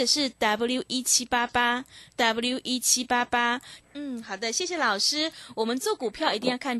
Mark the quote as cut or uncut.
cut